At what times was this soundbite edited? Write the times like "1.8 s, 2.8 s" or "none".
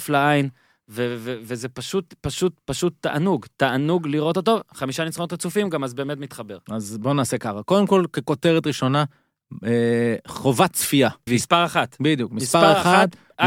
11.3 s